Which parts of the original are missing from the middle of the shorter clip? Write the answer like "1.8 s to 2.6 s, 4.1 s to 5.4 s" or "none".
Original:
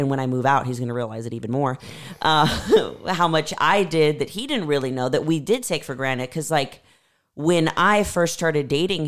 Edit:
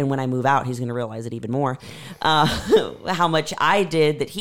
none